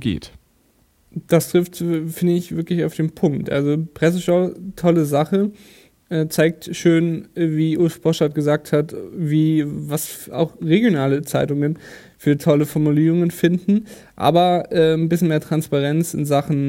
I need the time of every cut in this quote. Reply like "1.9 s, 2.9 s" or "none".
none